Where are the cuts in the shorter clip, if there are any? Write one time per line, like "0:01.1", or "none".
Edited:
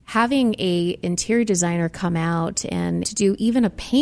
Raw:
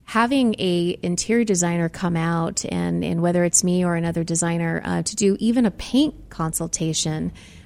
0:03.0